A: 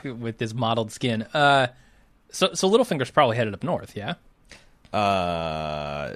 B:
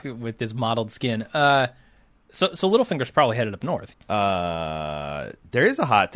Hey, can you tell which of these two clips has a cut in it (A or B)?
B